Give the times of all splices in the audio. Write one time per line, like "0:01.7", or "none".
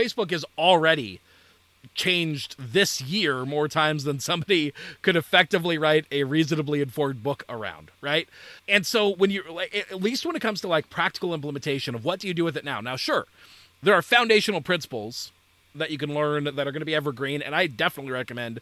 none